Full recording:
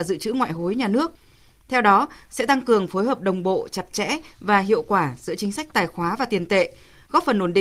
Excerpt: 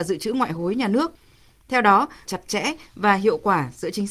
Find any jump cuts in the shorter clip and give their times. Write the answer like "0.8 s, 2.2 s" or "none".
2.2 s